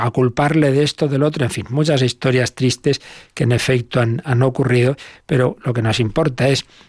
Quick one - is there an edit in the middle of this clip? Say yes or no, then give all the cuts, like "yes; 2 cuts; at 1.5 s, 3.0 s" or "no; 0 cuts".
no; 0 cuts